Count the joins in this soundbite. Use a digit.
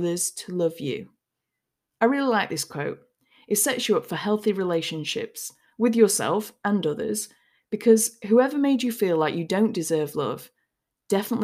0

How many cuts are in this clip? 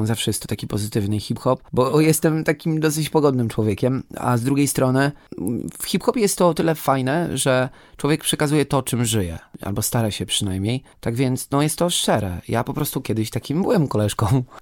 0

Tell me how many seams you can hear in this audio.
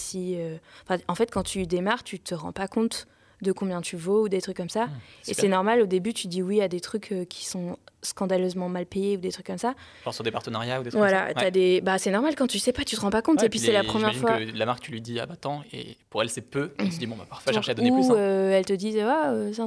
1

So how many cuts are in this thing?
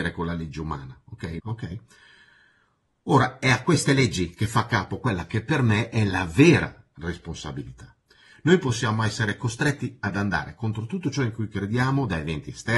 1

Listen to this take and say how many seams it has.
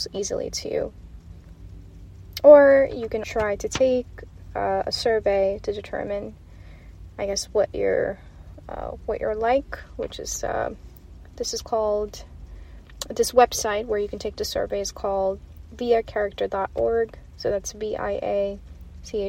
1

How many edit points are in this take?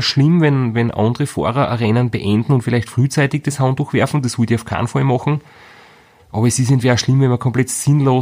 0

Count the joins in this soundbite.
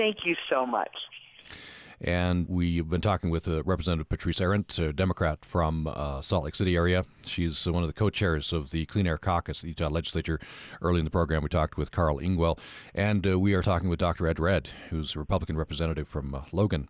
2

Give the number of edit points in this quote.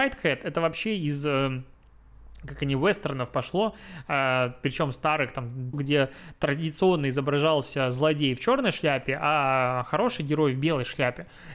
1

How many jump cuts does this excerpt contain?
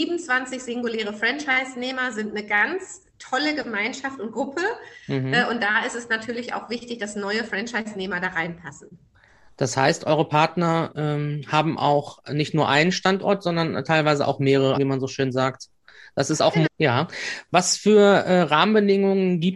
2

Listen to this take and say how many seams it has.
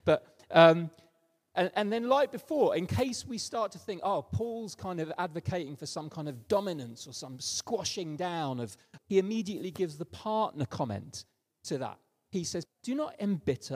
2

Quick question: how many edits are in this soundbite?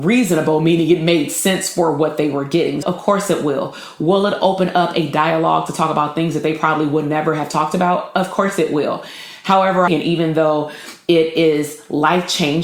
2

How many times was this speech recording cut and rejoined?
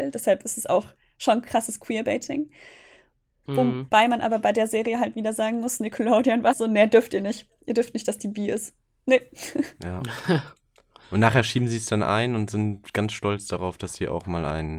1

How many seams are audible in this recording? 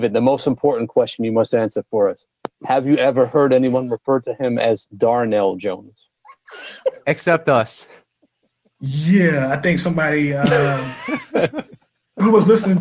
0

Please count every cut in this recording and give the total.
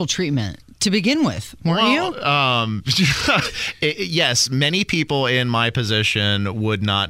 0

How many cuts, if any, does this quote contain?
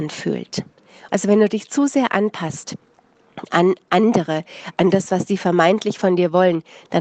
1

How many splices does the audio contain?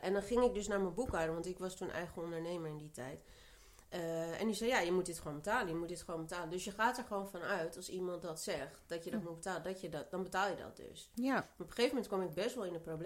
0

